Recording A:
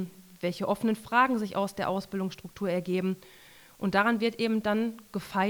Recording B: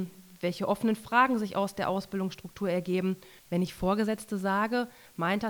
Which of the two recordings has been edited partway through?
B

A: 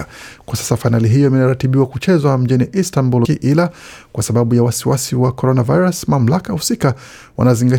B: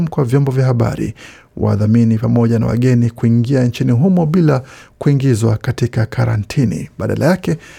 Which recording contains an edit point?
A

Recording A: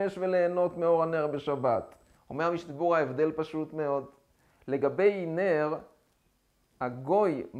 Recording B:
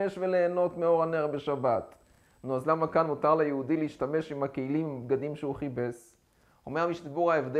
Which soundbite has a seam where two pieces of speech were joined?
A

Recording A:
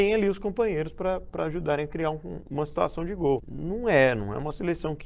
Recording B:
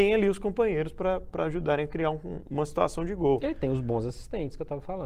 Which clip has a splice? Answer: A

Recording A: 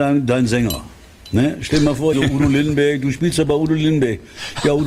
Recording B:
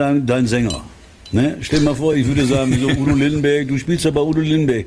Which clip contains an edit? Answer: A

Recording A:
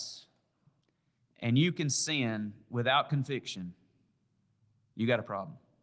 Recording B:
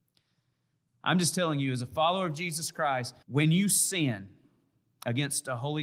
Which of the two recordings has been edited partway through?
B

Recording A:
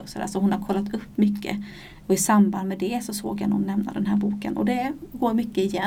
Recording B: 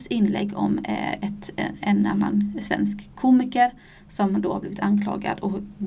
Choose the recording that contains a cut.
A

